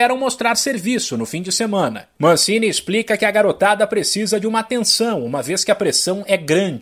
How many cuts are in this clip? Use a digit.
1